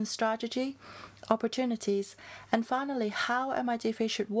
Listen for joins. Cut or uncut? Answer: cut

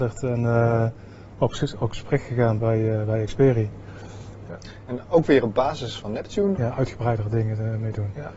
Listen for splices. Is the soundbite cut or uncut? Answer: cut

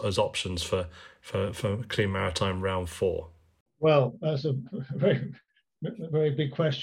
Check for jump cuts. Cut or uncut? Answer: uncut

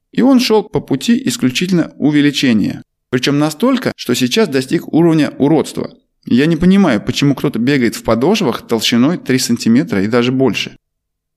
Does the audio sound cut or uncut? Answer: uncut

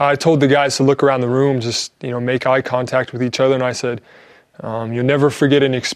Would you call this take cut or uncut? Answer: uncut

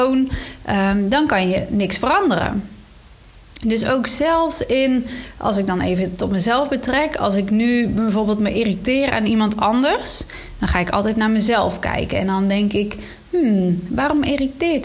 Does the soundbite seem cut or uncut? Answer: uncut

